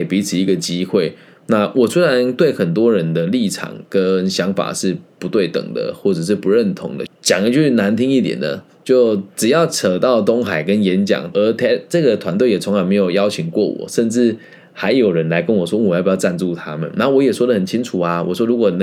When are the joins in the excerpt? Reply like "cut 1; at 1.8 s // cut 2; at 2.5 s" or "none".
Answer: cut 1; at 7.1 s // cut 2; at 11.3 s